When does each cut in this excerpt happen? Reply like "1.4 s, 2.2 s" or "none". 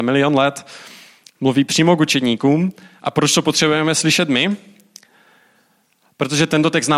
none